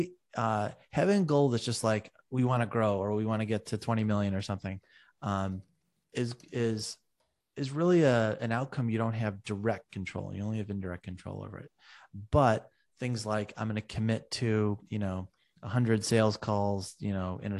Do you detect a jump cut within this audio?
no; 0 cuts

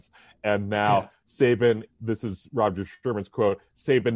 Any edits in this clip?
yes; 1 cut; at 1.9 s

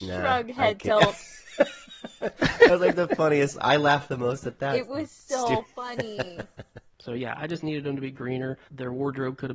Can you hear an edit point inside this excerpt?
no; 0 cuts

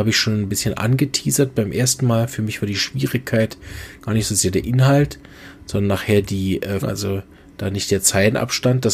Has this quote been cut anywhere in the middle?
yes; 1 cut; at 6.8 s

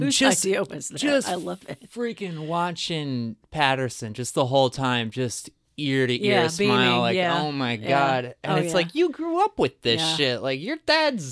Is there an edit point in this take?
no; 0 cuts

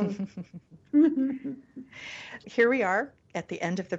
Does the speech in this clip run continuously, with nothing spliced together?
no; 1 cut; at 2.4 s

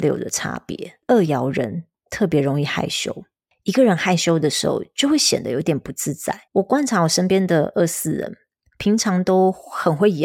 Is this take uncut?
no; 1 cut; at 6.5 s

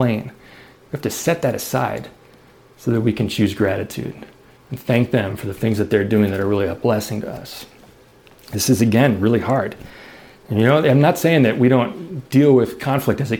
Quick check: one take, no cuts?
yes; 0 cuts

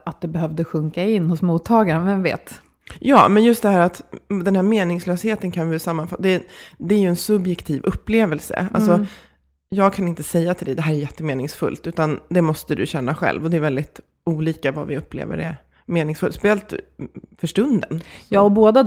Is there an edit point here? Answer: no; 0 cuts

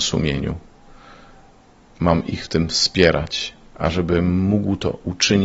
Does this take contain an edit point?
yes; 1 cut; at 1.9 s

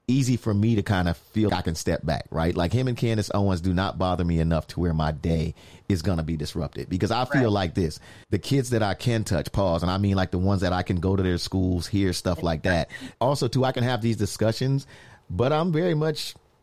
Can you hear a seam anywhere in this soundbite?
yes; 3 cuts; at 1.5 s, 8.2 s, 13.1 s

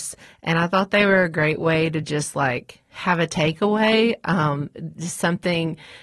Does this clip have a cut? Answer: no; 0 cuts

